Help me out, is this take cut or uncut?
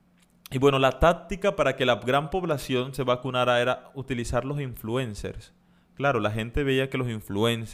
uncut